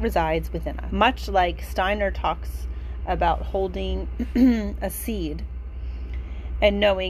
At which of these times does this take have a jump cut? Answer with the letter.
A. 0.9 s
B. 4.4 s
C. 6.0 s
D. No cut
A